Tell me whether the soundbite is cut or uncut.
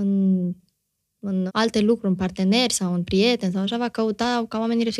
cut